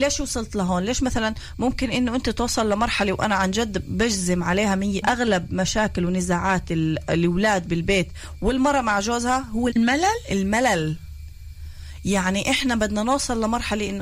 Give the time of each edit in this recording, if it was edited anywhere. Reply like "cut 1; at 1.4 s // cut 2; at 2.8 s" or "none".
cut 1; at 5.0 s // cut 2; at 9.7 s